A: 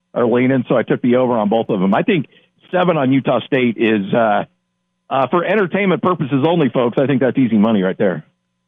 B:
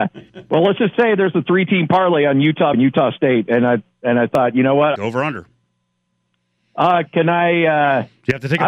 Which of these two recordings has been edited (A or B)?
B